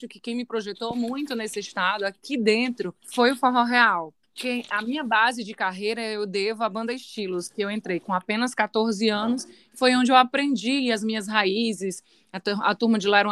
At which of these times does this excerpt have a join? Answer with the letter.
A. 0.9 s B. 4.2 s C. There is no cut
B